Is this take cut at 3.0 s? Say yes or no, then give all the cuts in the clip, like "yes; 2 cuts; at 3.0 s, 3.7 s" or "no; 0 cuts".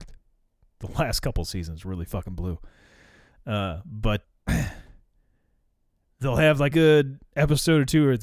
no; 2 cuts; at 4.2 s, 6.7 s